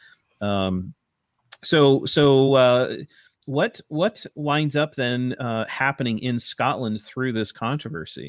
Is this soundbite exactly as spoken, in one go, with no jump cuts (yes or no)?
yes